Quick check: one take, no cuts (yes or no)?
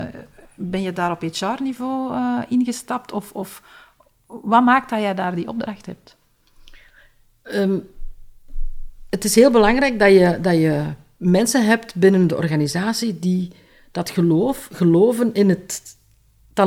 yes